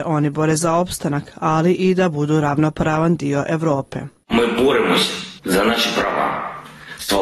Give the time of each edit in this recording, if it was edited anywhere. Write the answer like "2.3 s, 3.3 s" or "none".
5.4 s